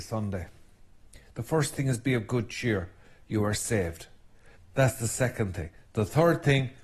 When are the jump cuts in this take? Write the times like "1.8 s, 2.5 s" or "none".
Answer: 4.6 s